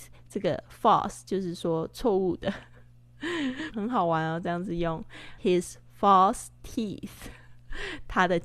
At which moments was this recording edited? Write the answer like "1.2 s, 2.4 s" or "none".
3.7 s, 5.4 s